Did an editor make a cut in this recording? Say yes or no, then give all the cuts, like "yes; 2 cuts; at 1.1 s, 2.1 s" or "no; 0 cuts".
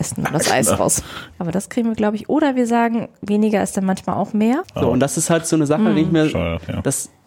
yes; 2 cuts; at 1.3 s, 4.6 s